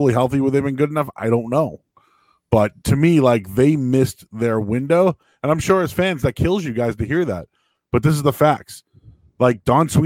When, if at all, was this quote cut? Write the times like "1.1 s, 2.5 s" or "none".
none